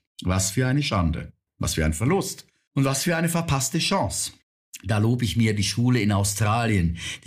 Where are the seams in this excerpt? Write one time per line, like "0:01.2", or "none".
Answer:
none